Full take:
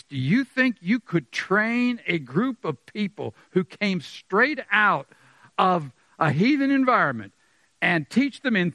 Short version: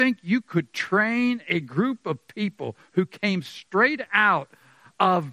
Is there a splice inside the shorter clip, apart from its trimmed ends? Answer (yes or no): no